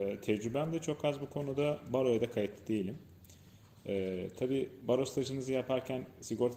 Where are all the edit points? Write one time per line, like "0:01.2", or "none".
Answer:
none